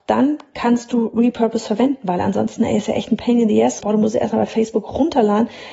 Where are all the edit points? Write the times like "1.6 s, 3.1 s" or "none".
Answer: 3.8 s